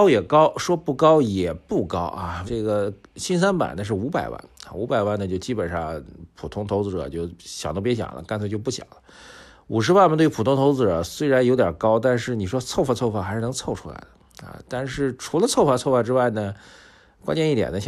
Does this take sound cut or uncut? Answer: cut